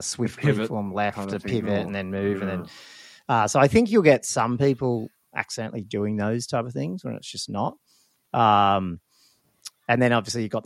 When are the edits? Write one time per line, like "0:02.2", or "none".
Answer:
none